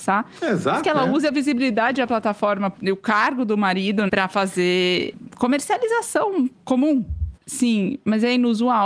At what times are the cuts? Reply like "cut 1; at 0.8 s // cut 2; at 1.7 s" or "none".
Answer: cut 1; at 4.1 s // cut 2; at 7.4 s